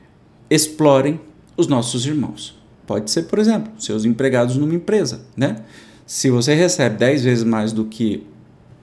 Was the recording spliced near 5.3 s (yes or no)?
yes